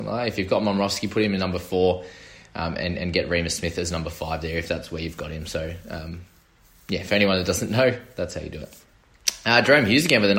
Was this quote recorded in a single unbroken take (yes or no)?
yes